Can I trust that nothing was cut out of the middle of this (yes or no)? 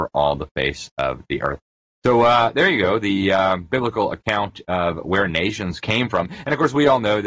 yes